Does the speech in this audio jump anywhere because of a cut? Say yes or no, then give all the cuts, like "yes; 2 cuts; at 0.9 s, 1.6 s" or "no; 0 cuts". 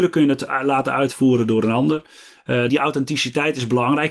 yes; 1 cut; at 2.7 s